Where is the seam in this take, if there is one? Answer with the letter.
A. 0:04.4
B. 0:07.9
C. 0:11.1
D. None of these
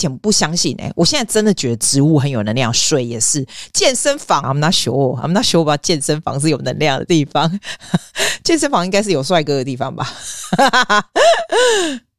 A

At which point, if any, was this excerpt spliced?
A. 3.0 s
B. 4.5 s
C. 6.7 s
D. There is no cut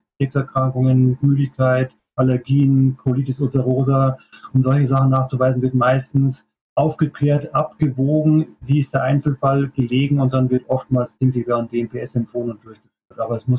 C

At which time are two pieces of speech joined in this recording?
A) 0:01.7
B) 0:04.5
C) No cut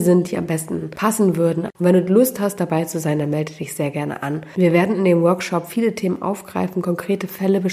A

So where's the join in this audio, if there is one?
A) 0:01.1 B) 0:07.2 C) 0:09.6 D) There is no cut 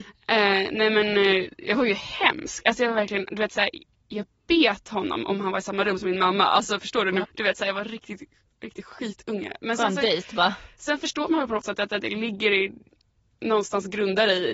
B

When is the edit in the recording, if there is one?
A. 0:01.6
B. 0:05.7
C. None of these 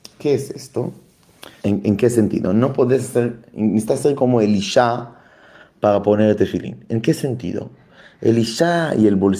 A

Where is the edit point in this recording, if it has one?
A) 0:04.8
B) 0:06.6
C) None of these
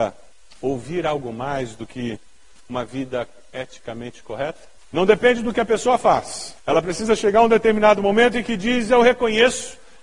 A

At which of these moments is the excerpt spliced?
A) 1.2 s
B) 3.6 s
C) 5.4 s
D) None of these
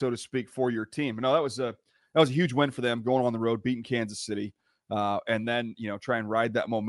D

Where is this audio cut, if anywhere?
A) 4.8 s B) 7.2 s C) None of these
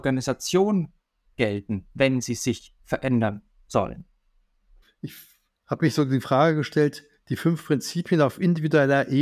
A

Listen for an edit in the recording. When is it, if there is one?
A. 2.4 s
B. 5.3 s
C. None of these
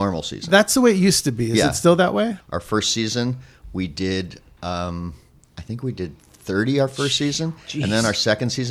A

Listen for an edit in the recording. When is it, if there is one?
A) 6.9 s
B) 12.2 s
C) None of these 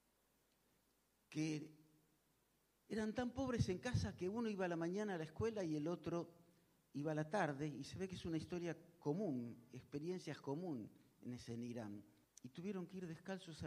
B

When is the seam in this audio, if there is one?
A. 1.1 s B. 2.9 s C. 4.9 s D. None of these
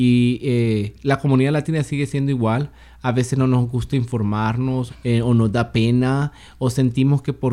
C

